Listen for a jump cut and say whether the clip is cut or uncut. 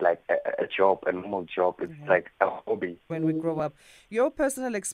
cut